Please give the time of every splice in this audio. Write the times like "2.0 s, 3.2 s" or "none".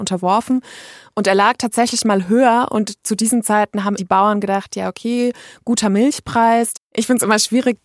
4.0 s, 6.7 s